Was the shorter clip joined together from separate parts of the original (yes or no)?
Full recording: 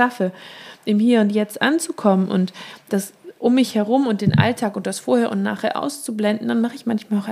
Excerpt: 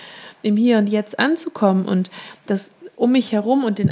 no